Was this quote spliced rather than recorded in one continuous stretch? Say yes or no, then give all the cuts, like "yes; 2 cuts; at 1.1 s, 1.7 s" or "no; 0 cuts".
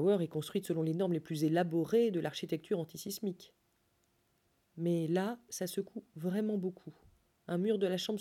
no; 0 cuts